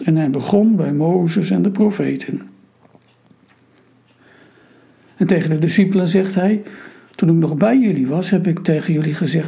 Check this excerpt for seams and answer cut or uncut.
uncut